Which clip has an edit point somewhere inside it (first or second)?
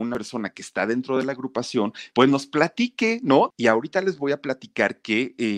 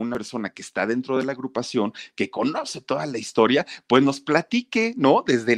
first